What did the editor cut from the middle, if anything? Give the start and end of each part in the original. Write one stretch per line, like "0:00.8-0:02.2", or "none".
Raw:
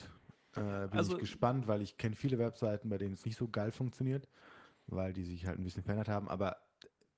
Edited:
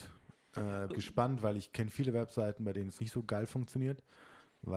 0:00.9-0:01.2